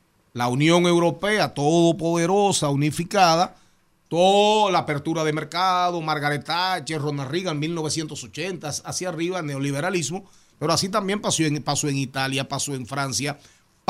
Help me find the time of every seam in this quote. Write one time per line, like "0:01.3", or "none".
0:10.5